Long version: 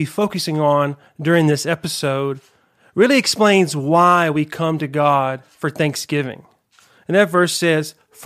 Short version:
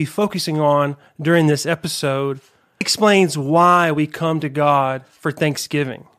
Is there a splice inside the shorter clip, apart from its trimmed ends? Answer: yes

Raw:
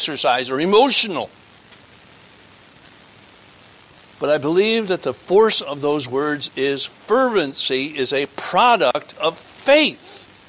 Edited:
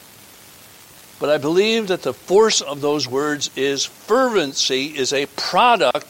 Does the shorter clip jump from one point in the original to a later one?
no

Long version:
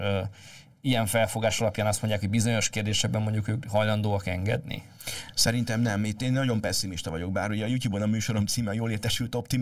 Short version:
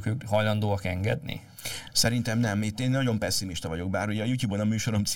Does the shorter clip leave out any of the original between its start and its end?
no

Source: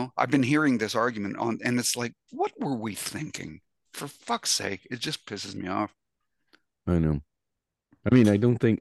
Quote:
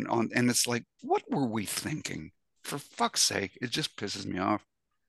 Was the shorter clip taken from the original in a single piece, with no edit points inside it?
yes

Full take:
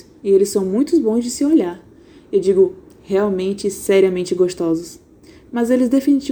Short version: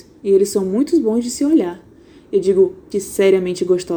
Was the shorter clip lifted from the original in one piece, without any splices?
no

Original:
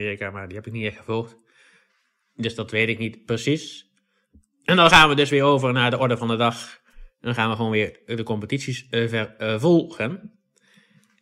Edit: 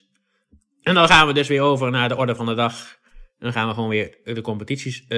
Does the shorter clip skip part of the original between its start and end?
no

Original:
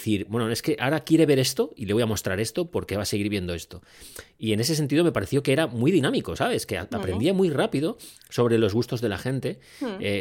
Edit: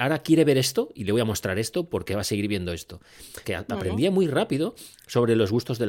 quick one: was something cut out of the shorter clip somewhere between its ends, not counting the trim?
yes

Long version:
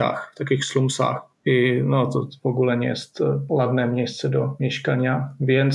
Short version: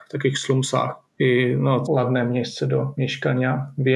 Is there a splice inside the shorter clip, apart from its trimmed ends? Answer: yes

